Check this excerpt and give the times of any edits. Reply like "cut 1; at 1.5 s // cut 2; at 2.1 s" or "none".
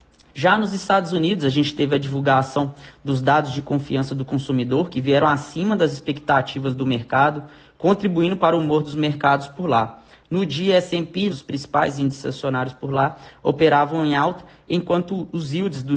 cut 1; at 11.3 s